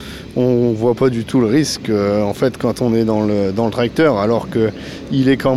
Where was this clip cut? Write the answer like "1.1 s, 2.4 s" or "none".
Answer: none

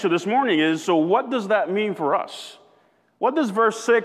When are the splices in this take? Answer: none

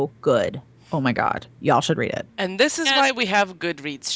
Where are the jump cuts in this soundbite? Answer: 2.3 s

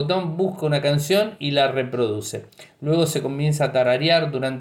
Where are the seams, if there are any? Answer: none

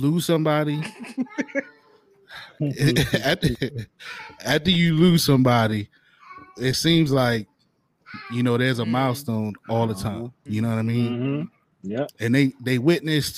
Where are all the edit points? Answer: 10.5 s

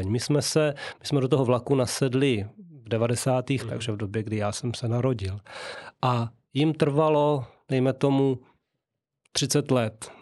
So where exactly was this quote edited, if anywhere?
3.6 s

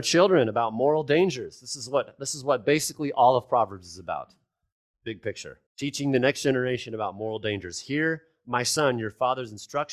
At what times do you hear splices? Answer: 5.7 s

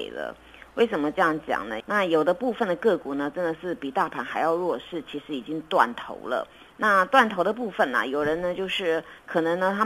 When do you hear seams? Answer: 1.8 s

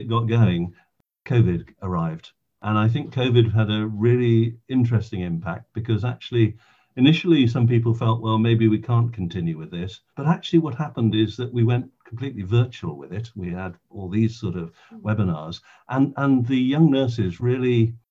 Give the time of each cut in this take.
10.1 s

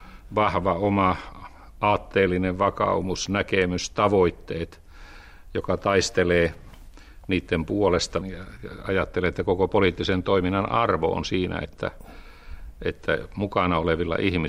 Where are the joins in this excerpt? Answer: 8.2 s

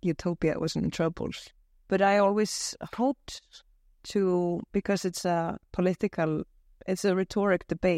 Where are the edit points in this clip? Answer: 1.7 s

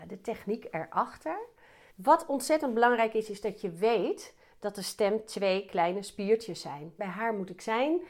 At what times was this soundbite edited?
1.9 s, 7.0 s

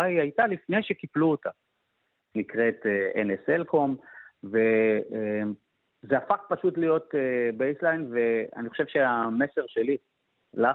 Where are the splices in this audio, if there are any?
2.3 s

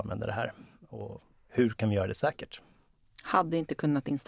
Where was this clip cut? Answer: none

